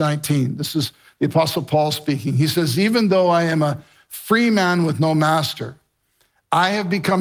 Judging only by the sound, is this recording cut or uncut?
uncut